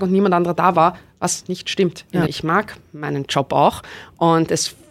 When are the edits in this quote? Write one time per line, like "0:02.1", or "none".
0:02.3